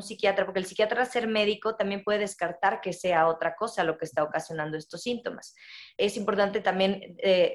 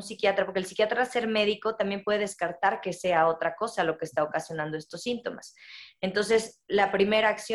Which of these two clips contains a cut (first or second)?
first